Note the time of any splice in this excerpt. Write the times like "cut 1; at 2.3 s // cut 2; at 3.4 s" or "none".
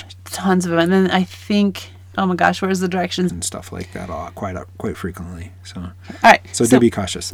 cut 1; at 3.3 s